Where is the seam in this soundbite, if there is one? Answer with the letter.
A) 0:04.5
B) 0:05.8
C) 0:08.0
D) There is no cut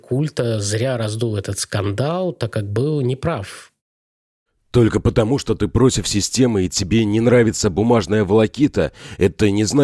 D